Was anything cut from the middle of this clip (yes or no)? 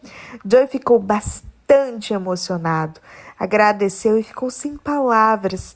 no